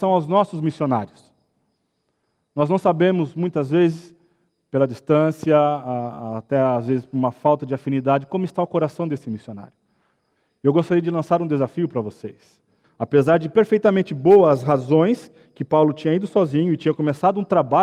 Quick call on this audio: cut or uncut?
cut